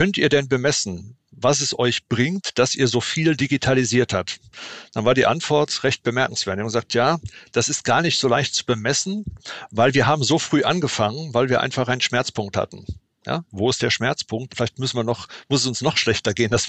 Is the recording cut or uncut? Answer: cut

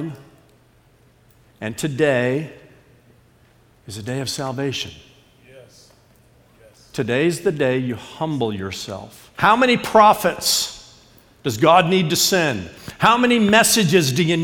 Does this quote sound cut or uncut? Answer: cut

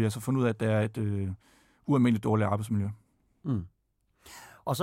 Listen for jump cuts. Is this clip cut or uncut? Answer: uncut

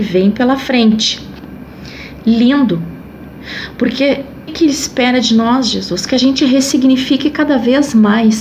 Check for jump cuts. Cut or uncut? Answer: cut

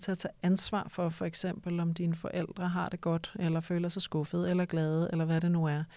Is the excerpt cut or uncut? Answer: uncut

